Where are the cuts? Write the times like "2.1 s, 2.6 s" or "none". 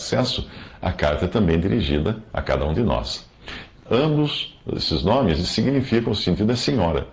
3.9 s